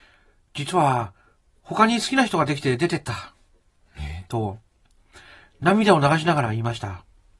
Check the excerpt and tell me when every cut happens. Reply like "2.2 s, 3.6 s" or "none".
1.6 s